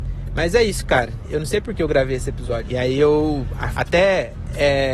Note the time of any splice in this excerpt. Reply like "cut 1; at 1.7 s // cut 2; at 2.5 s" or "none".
cut 1; at 2.6 s // cut 2; at 3.7 s